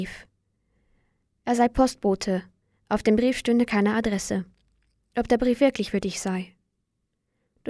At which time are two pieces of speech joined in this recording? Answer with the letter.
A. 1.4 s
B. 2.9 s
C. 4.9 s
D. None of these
D